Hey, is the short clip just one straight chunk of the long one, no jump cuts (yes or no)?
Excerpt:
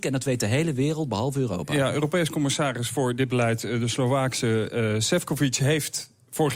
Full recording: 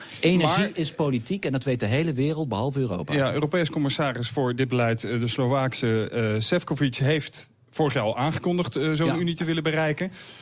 yes